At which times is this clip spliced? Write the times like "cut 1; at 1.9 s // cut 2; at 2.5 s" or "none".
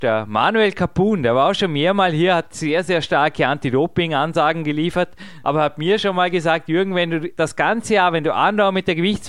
cut 1; at 5.4 s